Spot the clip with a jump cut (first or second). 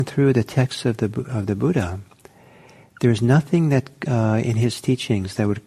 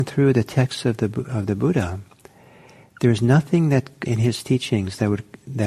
second